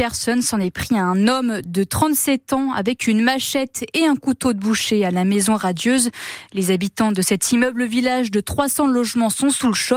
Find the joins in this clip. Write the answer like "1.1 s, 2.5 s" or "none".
none